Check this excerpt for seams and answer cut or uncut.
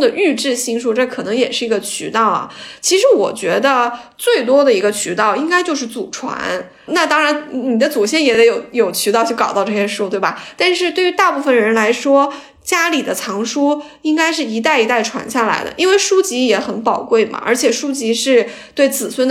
uncut